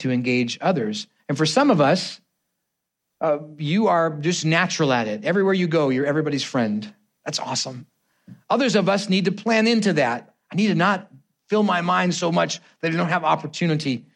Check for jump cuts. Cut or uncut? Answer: uncut